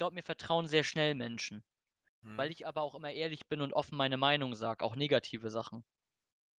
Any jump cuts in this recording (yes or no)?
no